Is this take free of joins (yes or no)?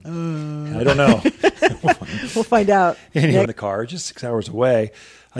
no